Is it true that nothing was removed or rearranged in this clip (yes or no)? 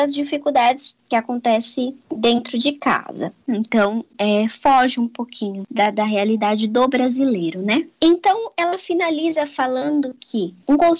no